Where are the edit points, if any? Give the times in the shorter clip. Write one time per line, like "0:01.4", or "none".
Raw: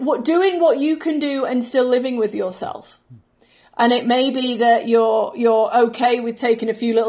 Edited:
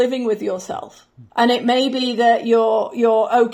0:01.3